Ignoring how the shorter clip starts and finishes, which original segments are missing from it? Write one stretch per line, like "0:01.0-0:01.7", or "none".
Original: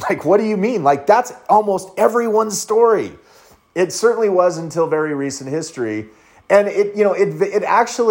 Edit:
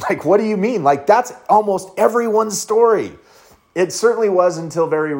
none